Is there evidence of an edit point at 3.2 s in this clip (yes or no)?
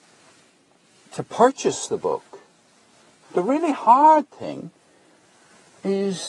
yes